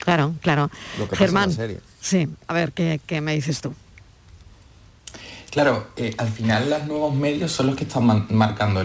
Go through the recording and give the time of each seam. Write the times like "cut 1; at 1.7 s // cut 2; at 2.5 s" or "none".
none